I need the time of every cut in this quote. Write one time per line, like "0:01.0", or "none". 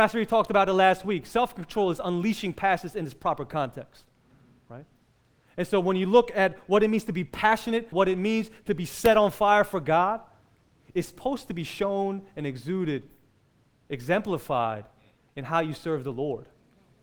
0:07.9